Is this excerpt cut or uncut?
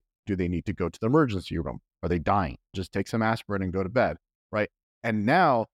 cut